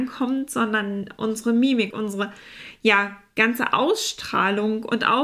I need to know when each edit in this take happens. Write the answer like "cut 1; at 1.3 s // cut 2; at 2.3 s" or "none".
cut 1; at 1.9 s